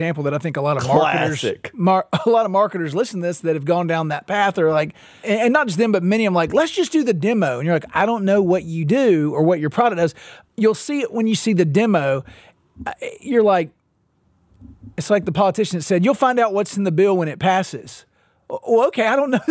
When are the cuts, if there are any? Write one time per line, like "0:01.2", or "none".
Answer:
none